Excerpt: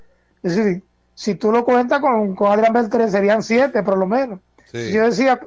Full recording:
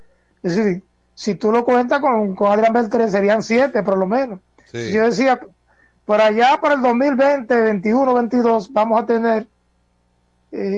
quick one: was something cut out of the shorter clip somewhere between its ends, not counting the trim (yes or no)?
no